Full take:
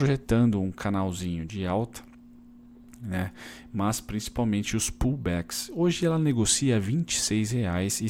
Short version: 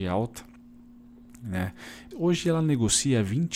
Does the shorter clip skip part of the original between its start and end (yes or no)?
yes